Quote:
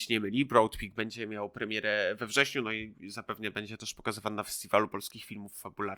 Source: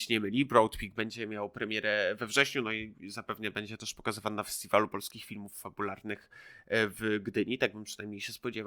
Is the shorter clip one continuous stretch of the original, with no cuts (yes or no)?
yes